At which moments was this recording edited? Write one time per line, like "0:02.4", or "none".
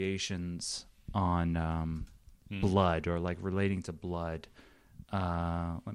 none